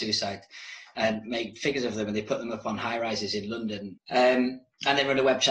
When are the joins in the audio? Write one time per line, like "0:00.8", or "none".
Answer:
0:04.0